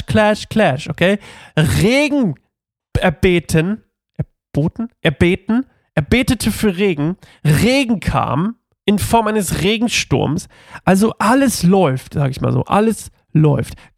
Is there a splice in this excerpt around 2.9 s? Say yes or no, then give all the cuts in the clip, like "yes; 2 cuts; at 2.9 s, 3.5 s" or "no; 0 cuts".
yes; 1 cut; at 2.9 s